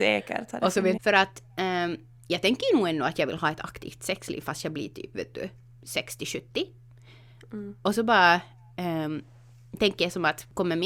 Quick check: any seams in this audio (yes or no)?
yes